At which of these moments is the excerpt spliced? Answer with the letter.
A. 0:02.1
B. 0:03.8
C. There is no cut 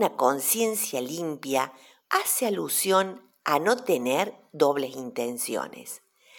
A